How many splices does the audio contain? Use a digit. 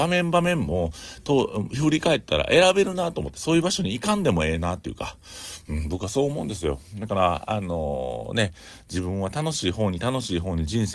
0